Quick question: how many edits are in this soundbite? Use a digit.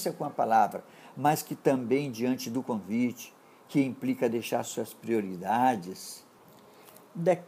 0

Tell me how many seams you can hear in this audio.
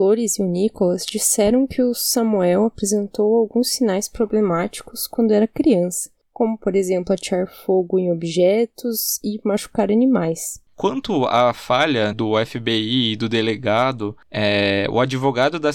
2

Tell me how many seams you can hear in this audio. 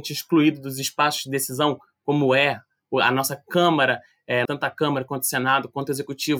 1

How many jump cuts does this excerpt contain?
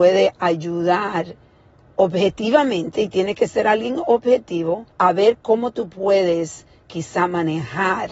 1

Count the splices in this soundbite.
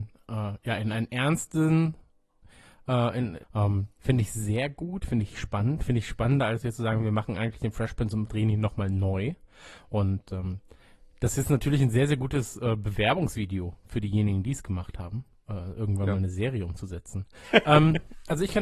2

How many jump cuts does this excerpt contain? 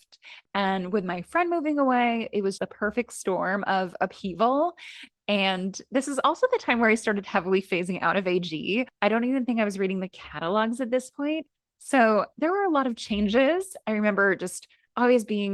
1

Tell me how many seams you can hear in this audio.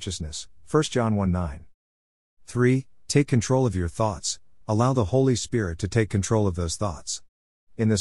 1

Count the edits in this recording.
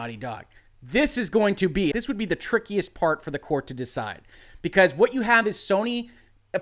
1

